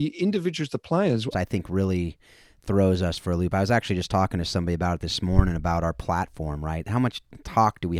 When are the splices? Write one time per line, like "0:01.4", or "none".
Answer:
0:01.3

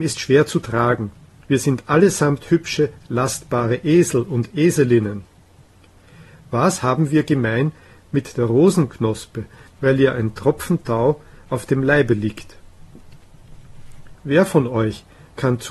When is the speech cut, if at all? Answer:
0:01.4
0:09.7
0:14.1

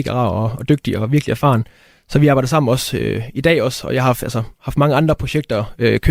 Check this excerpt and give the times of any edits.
none

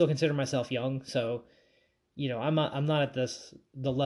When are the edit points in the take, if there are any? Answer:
none

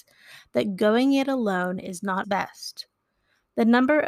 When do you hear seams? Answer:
0:02.2

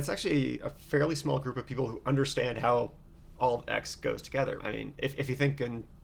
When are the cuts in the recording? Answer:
0:04.6

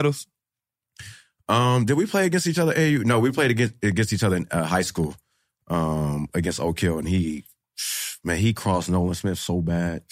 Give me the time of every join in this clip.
none

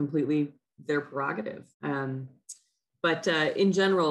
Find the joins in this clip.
0:01.7

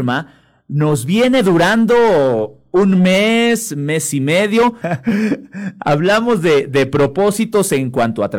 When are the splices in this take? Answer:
0:04.8

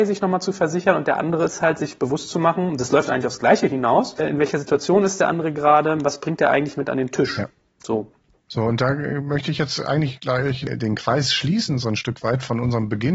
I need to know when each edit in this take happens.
none

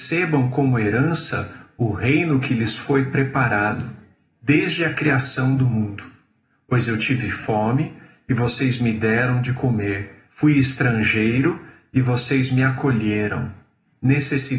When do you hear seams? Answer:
0:10.3

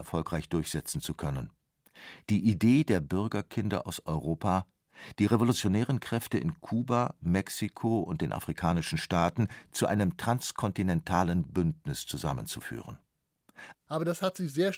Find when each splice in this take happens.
0:09.7
0:13.7

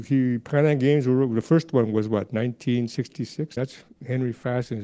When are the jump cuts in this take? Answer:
0:03.6

